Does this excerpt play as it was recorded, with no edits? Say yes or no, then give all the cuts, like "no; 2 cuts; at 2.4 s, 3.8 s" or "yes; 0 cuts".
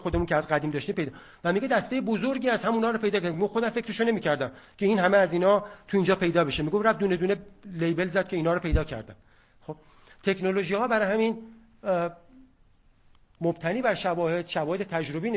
yes; 0 cuts